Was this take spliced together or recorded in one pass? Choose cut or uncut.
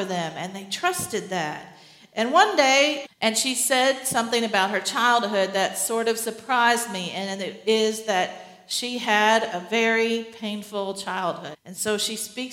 cut